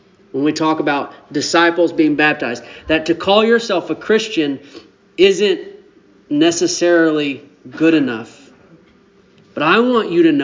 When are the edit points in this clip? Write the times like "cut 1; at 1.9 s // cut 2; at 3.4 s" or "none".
none